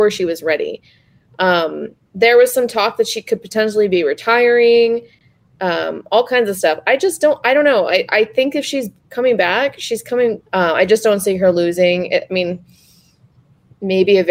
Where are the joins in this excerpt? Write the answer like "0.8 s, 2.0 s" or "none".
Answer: 10.4 s